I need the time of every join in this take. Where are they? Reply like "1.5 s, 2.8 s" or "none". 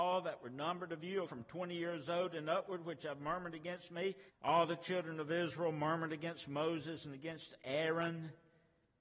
1.2 s, 4.3 s